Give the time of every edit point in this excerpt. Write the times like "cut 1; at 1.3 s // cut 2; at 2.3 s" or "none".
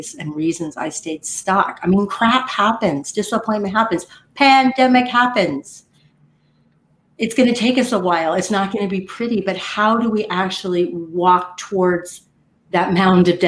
none